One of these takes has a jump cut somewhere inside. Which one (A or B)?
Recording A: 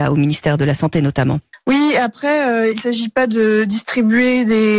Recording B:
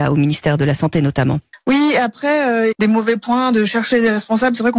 B